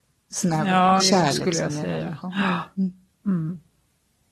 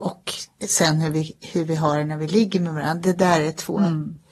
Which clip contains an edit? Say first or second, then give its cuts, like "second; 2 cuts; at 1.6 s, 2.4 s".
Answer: first; 1 cut; at 1.0 s